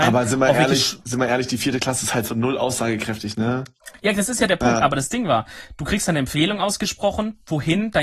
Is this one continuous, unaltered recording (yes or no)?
yes